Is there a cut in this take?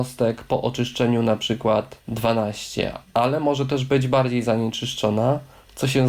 no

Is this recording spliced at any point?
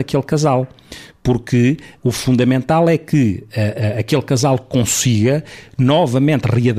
no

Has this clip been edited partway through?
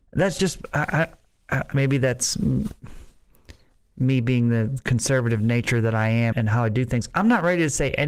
yes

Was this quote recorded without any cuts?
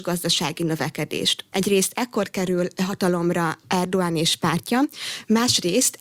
no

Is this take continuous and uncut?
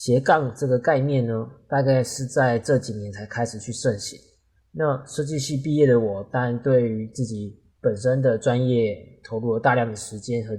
no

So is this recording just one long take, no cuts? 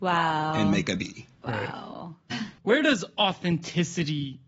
no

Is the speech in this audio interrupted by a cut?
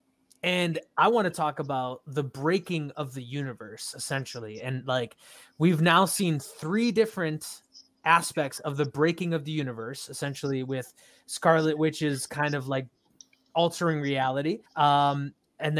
yes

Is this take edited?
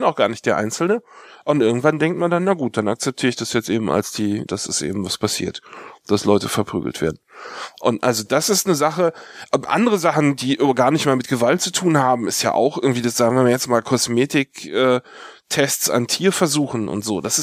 yes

